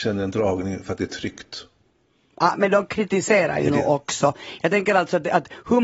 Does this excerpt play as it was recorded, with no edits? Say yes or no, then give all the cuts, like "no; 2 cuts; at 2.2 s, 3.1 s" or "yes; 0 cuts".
yes; 0 cuts